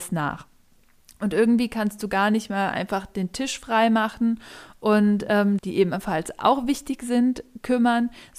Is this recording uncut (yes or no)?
no